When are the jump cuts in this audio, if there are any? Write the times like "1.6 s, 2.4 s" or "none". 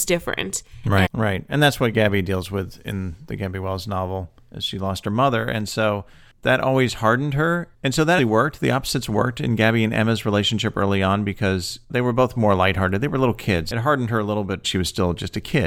1.1 s, 8.2 s, 14.6 s